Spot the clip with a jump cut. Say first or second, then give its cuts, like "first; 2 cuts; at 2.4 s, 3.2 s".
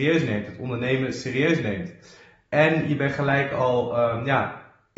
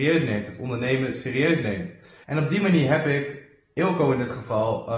second; 1 cut; at 2.2 s